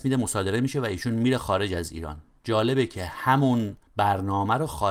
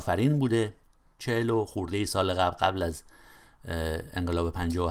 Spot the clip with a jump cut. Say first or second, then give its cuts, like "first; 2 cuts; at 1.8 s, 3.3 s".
first; 1 cut; at 3.9 s